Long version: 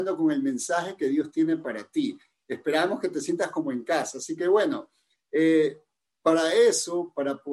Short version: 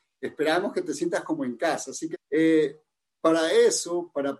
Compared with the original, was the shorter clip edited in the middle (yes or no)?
yes